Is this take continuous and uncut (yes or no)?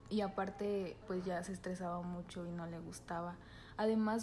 no